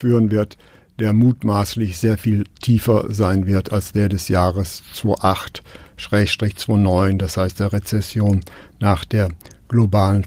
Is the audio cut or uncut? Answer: uncut